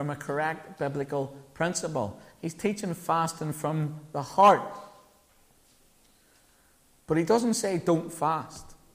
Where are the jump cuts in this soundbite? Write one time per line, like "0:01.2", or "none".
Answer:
none